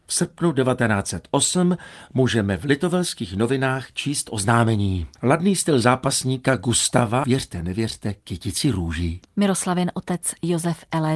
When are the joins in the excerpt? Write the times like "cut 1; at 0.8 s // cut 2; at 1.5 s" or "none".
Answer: cut 1; at 5.2 s // cut 2; at 7.2 s // cut 3; at 9.2 s